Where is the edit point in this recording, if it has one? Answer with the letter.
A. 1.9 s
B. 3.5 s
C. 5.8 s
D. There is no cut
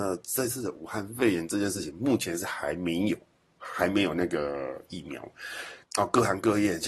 C